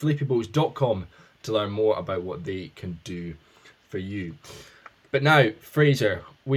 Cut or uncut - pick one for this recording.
uncut